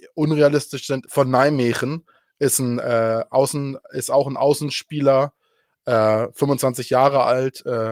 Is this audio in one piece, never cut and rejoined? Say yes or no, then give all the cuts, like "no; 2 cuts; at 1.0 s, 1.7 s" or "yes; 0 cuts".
no; 1 cut; at 1.0 s